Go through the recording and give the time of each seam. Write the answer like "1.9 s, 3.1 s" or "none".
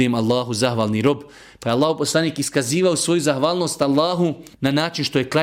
4.5 s